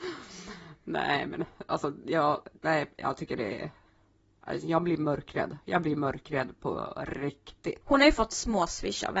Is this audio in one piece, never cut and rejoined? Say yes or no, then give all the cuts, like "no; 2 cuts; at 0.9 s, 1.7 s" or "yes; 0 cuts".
no; 1 cut; at 7.8 s